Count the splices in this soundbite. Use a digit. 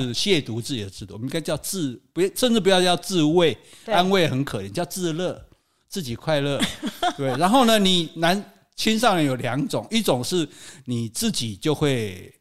0